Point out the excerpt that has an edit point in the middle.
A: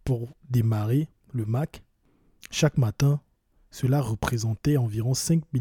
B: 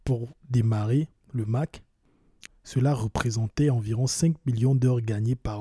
B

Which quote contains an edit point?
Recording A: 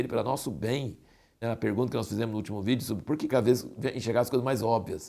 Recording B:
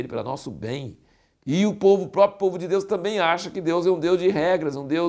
A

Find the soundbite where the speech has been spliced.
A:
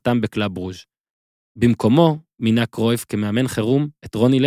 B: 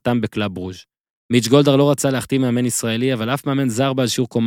B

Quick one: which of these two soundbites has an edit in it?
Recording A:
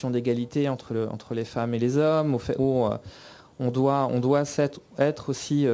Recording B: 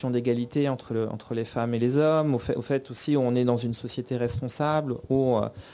A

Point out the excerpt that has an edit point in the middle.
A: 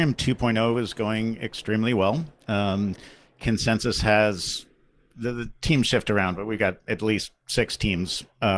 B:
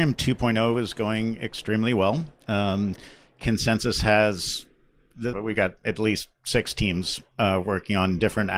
B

